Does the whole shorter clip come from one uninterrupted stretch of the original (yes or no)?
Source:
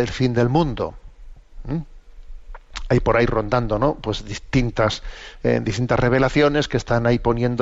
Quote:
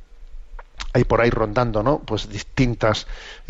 yes